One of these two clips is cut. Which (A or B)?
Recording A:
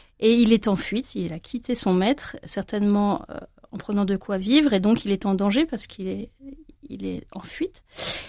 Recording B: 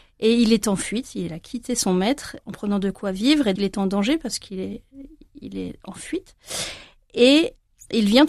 B